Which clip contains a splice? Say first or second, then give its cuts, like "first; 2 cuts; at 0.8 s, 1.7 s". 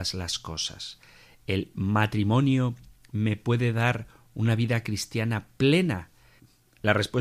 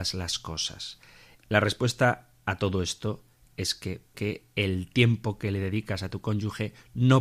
second; 2 cuts; at 1.4 s, 4.1 s